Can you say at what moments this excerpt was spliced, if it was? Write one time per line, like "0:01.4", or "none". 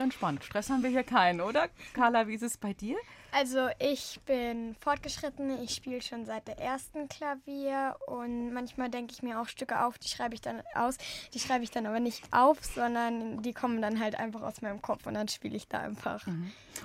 0:10.7